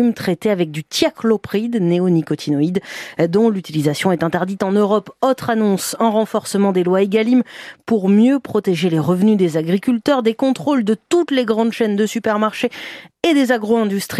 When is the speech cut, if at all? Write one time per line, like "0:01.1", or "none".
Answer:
none